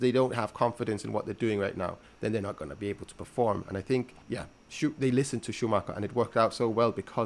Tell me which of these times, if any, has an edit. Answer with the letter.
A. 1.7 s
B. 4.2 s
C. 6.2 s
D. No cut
B